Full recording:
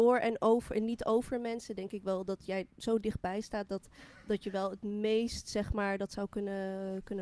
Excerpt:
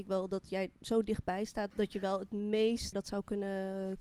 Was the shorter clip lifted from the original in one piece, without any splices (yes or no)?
no